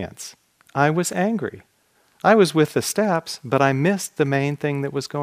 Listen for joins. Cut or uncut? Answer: uncut